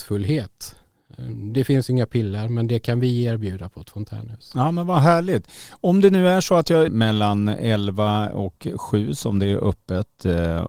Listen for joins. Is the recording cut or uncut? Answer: cut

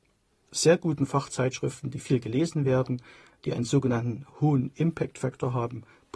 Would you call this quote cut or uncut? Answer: uncut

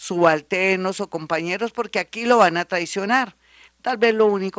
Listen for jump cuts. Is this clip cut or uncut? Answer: cut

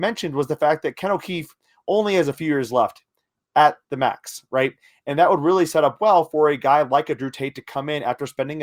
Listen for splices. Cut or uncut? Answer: uncut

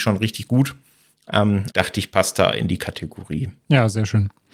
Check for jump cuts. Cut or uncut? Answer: cut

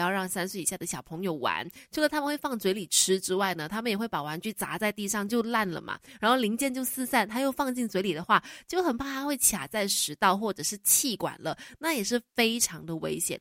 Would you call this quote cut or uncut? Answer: uncut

